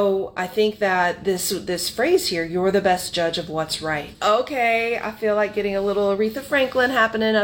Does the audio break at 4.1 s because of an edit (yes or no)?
yes